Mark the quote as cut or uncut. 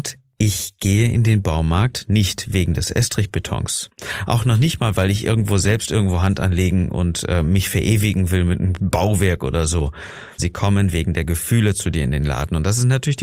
cut